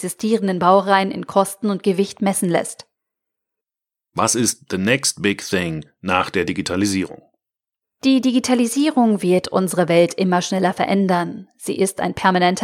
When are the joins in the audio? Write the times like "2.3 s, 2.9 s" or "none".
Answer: none